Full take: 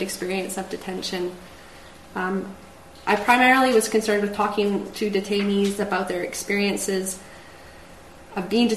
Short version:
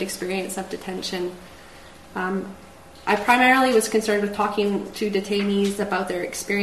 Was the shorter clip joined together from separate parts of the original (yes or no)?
no